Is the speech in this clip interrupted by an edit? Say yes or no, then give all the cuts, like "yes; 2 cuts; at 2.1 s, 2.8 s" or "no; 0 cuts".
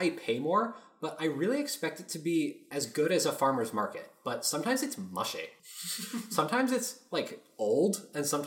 no; 0 cuts